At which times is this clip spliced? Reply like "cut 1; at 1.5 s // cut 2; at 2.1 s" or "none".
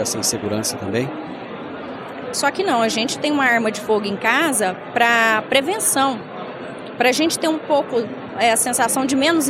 cut 1; at 2.3 s